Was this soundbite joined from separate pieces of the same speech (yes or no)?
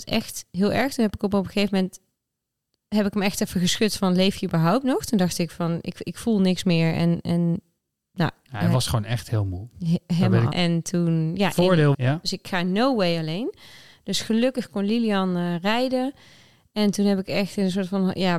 yes